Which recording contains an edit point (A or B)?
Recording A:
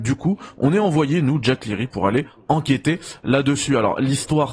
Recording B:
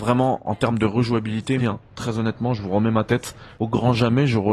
B